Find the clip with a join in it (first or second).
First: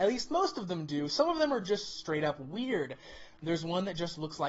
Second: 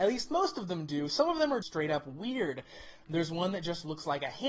second